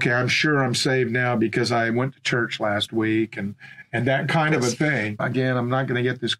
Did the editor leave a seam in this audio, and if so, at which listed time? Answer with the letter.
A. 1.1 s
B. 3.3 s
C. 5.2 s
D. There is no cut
C